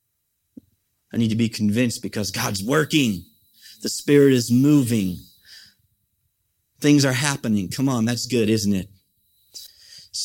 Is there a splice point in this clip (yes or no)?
no